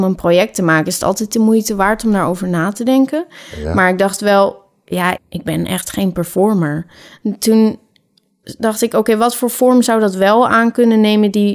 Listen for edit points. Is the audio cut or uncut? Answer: cut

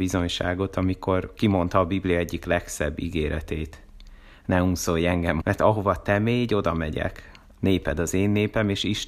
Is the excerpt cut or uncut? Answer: cut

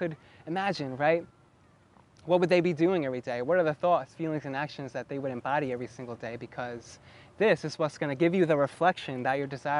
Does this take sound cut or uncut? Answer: uncut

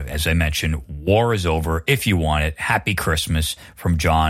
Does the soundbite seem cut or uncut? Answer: uncut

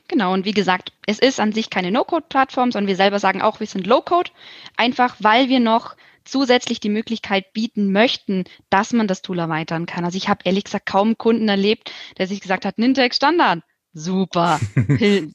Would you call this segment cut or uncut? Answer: uncut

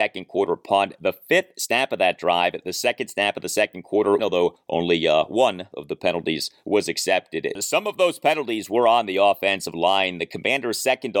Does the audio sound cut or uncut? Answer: cut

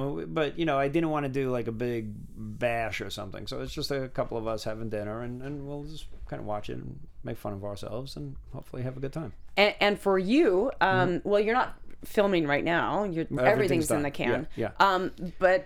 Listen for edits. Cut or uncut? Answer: cut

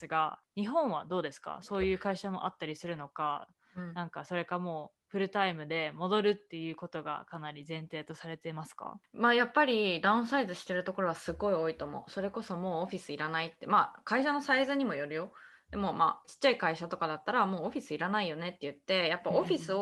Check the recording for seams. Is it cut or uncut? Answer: uncut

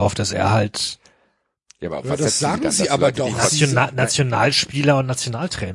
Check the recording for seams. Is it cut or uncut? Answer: uncut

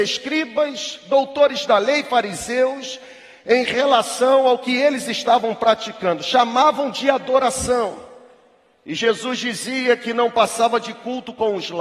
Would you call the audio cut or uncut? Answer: uncut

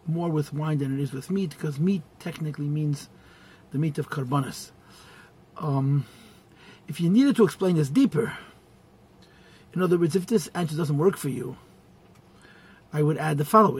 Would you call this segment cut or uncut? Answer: uncut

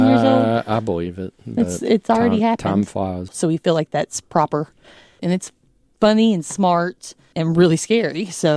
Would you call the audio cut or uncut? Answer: cut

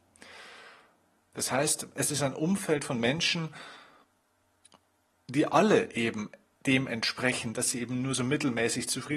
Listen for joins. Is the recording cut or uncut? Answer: cut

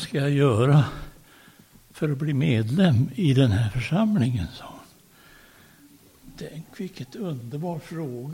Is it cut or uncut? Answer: uncut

